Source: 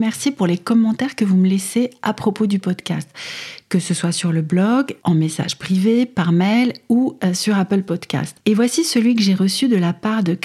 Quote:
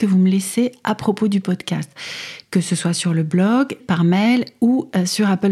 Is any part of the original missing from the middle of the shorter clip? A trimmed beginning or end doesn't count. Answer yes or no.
yes